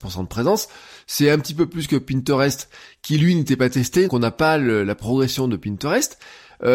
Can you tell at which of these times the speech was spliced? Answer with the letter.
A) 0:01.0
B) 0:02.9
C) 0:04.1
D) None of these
C